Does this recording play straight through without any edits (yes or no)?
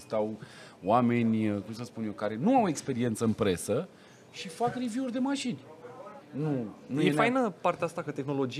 no